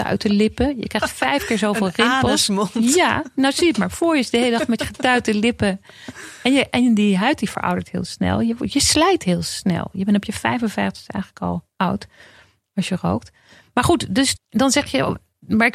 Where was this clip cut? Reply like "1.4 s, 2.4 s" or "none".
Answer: 14.3 s